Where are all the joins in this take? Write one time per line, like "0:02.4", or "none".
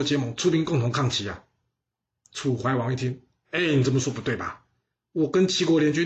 none